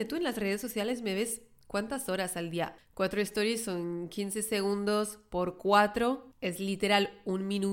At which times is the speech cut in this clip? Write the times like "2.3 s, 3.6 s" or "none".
2.8 s